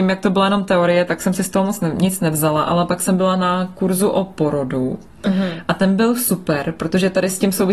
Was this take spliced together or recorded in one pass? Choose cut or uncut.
uncut